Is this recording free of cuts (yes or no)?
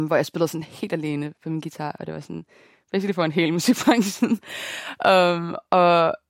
yes